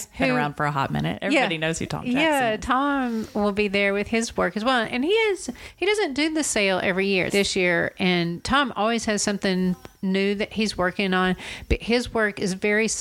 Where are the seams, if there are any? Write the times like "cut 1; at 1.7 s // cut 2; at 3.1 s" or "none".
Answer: cut 1; at 7.3 s